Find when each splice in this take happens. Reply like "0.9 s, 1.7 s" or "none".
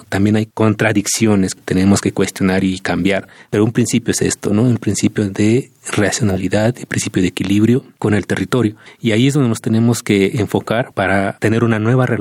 none